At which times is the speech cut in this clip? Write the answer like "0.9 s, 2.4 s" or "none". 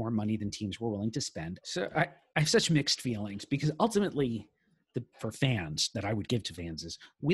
1.6 s, 5.1 s